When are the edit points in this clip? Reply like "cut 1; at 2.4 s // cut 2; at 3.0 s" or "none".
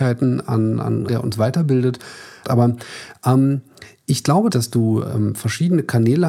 cut 1; at 1.1 s // cut 2; at 2.4 s // cut 3; at 4.5 s